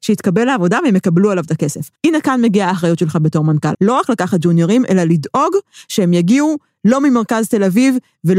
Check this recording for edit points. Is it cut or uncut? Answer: cut